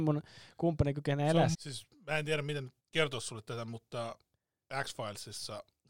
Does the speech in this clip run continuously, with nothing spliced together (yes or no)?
no